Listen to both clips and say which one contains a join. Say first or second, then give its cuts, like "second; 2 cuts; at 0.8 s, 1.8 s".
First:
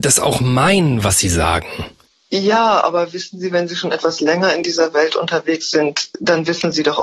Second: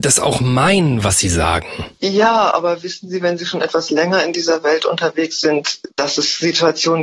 second; 2 cuts; at 2.0 s, 5.9 s